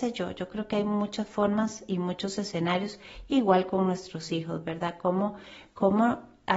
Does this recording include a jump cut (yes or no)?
no